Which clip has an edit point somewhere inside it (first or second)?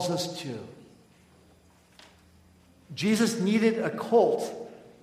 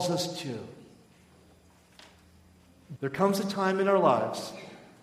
second